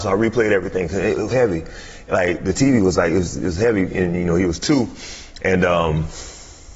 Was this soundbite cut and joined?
yes; 1 cut; at 1.3 s

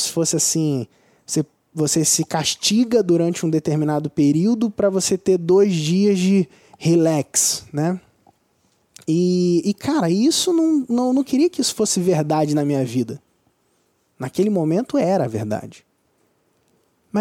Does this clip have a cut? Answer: no; 0 cuts

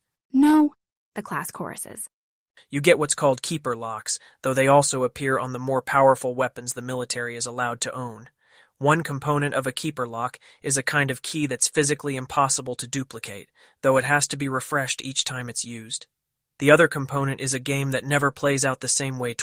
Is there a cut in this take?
yes; 1 cut; at 2.6 s

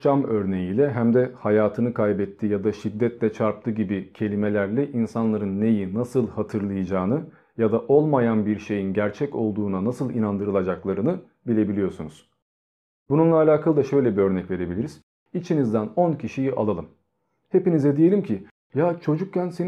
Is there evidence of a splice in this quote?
no; 0 cuts

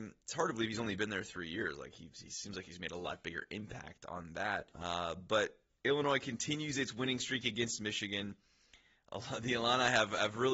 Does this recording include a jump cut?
yes; 1 cut; at 4.7 s

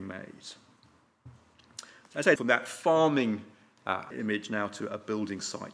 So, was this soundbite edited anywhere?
yes; 2 cuts; at 2.4 s, 4.1 s

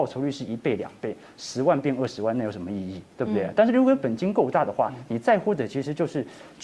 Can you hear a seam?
no; 0 cuts

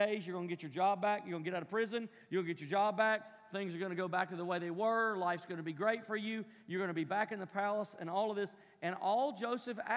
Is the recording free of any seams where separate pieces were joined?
yes; 0 cuts

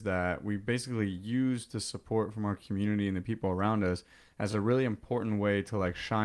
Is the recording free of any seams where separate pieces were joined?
yes; 0 cuts

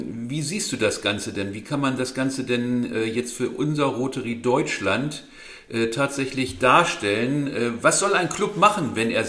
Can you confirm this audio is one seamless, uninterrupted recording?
yes; 0 cuts

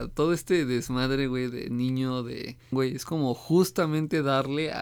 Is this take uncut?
no; 1 cut; at 2.7 s

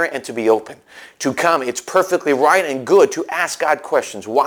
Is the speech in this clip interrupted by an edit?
no; 0 cuts

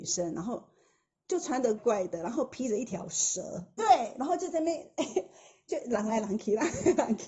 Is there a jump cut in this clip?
yes; 2 cuts; at 1.8 s, 3.8 s

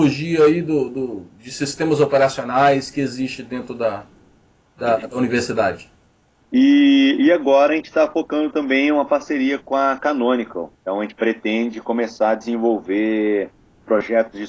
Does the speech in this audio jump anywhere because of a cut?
yes; 2 cuts; at 6.4 s, 10.7 s

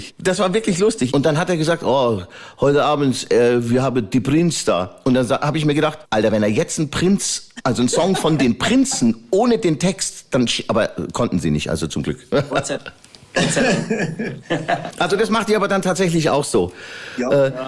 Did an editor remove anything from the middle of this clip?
yes; 1 cut; at 1.1 s

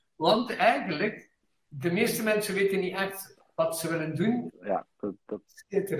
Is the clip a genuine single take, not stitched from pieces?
no; 1 cut; at 4.5 s

